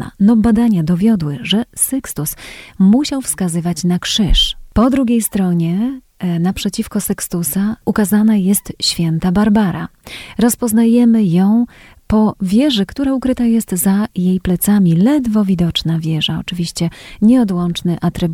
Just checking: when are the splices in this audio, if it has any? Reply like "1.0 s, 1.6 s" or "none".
none